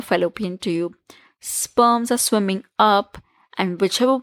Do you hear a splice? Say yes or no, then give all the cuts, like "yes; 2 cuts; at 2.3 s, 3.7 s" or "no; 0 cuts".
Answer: no; 0 cuts